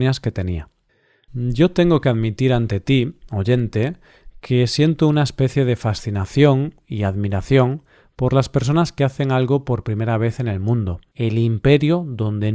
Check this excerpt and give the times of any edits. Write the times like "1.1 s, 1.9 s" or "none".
11.1 s